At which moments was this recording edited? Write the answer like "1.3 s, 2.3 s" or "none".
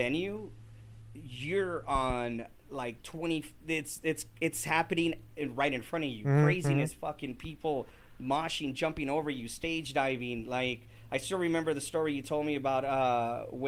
3.6 s

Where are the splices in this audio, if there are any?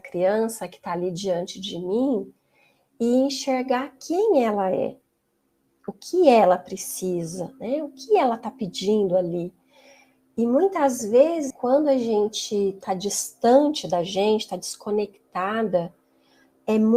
11.5 s

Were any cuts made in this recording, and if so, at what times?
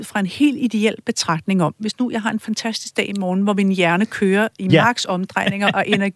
none

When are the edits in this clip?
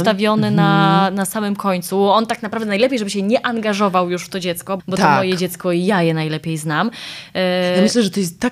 4.8 s

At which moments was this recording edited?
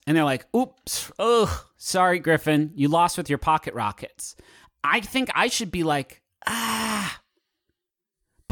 none

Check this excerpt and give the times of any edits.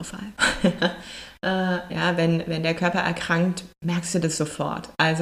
1.9 s

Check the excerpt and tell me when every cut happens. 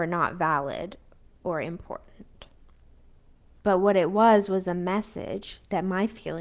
3.6 s

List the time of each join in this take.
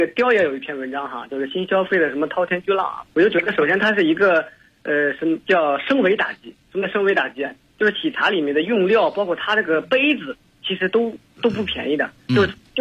3.1 s

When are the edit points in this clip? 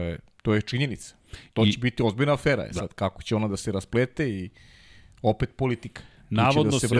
none

